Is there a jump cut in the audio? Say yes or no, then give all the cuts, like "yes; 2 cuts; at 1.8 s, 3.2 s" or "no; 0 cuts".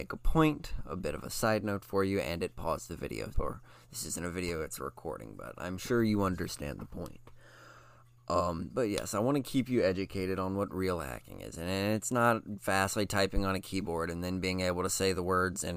yes; 1 cut; at 3.3 s